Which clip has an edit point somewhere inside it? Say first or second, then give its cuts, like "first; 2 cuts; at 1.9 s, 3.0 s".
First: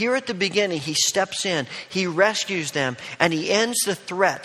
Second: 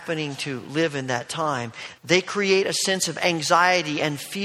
second; 1 cut; at 2.0 s